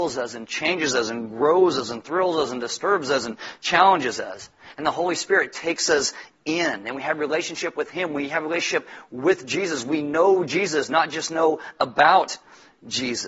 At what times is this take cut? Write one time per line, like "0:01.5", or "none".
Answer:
none